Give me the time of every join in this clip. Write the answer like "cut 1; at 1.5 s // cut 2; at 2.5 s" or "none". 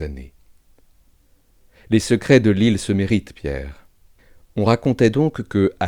none